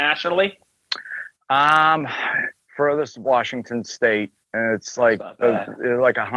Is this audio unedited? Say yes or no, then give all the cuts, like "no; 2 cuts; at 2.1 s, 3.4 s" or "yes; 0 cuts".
no; 2 cuts; at 2.7 s, 4.4 s